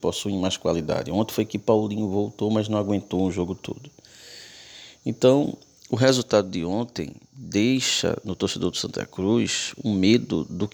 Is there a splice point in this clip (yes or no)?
no